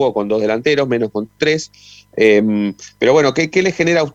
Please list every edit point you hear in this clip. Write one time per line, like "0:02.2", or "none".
none